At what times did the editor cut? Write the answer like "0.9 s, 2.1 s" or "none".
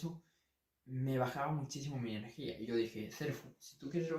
none